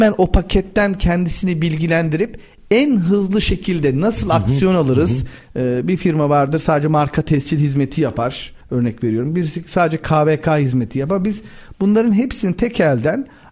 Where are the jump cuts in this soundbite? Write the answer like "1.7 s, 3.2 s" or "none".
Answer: 5.5 s